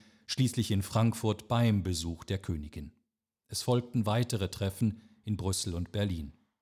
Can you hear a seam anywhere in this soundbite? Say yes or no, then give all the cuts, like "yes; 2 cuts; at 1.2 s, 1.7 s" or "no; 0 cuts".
no; 0 cuts